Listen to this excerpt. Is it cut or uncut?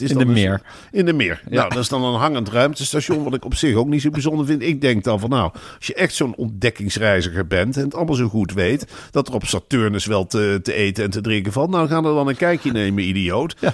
uncut